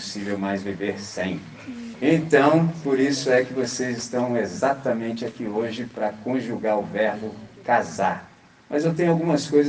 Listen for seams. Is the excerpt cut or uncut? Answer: cut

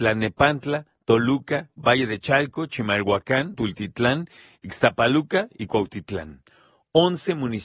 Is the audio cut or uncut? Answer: cut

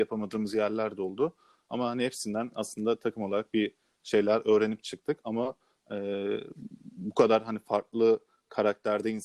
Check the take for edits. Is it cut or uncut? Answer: uncut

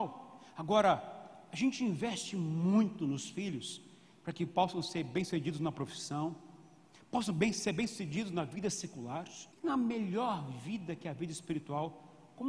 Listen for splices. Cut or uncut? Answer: cut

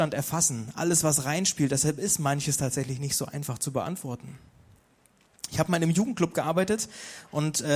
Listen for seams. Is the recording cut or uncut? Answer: uncut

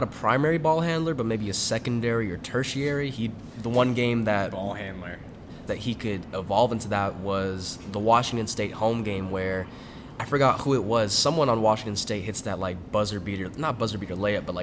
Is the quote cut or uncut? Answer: cut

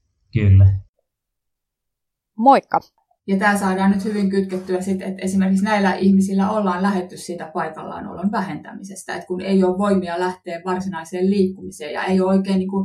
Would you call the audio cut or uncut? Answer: cut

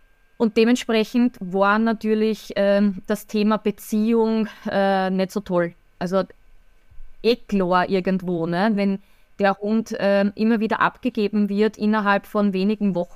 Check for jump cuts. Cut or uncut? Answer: uncut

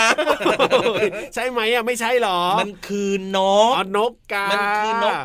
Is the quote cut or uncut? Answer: uncut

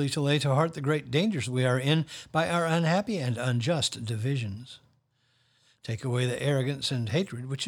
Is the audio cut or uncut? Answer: cut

